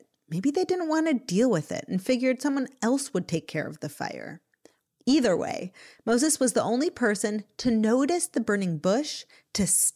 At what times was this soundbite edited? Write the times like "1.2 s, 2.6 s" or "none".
4.9 s

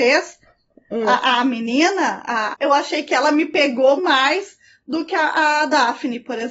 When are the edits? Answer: 2.5 s, 4.0 s

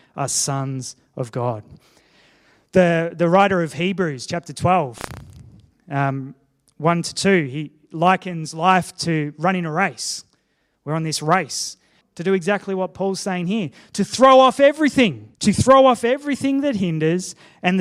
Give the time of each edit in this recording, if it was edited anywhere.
12.0 s, 15.3 s

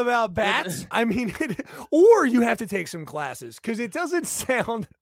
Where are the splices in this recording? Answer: 0.9 s

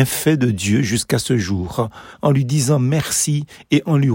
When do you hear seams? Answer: 2.1 s

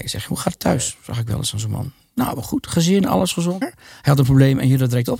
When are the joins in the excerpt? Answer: 3.6 s

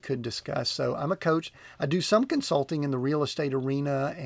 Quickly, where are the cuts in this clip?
none

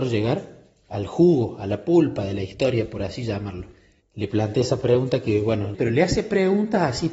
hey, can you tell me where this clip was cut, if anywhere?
4.0 s, 5.7 s

